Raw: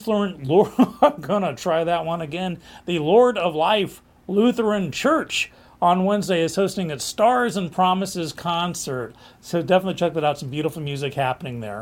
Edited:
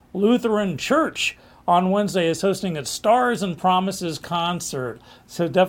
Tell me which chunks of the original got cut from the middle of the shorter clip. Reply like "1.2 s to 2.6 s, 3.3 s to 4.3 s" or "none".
none